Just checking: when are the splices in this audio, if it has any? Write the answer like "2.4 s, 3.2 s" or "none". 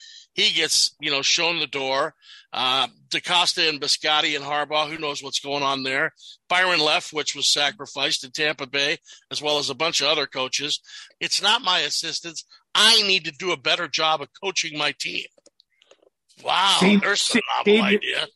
11.1 s